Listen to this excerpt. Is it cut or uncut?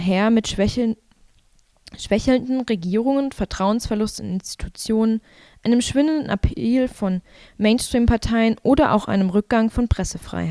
uncut